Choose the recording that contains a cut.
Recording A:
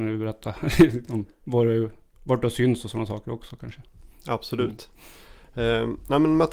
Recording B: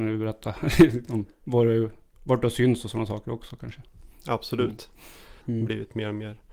B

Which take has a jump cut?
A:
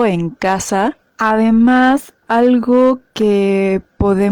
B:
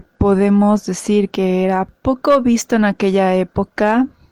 A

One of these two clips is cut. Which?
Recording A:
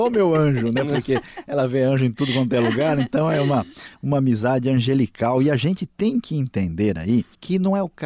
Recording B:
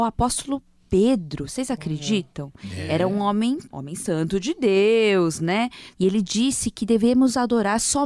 B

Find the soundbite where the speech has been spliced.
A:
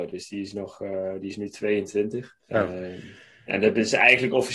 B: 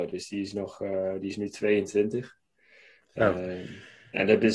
A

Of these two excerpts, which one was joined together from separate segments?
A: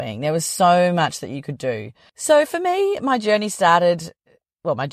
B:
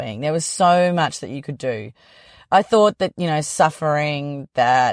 A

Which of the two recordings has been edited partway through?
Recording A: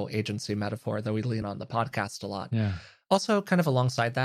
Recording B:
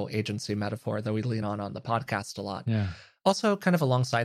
A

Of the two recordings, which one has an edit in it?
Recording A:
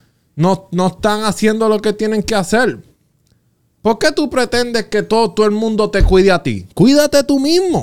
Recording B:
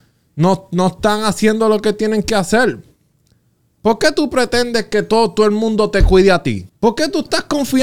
B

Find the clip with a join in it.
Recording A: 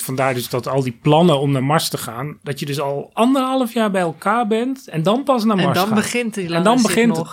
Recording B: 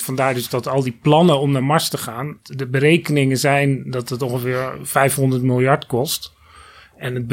A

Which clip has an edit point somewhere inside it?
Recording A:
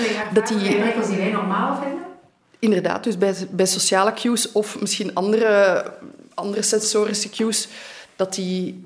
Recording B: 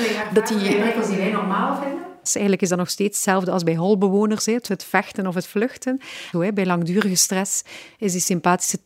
B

